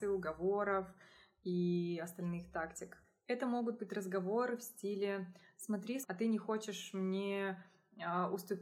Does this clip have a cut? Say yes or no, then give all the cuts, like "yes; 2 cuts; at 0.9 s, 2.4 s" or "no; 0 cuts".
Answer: yes; 1 cut; at 6.0 s